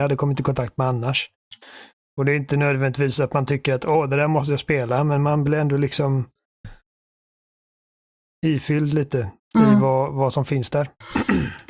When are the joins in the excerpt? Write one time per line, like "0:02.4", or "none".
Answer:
none